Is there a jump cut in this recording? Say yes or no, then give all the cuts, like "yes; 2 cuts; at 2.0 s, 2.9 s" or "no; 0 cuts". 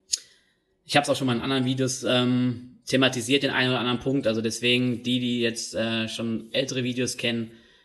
no; 0 cuts